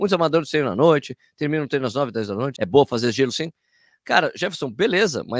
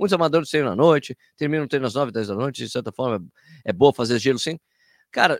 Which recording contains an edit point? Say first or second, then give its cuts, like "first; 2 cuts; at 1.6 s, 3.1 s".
first; 1 cut; at 2.6 s